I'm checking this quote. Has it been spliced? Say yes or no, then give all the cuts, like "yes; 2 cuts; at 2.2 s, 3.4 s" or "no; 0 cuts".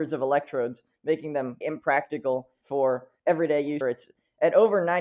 yes; 2 cuts; at 1.6 s, 3.8 s